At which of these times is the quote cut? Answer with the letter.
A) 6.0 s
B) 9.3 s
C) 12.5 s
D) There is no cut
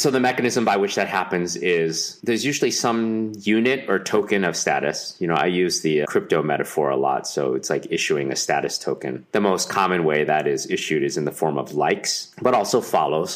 A